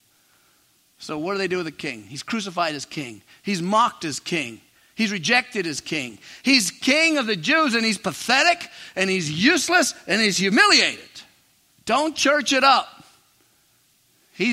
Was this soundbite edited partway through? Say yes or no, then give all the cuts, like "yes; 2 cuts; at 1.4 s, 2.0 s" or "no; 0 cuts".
yes; 1 cut; at 11.7 s